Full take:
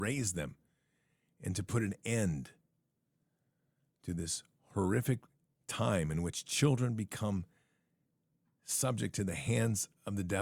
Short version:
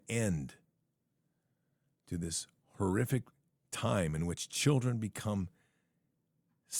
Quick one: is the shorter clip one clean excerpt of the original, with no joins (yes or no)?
yes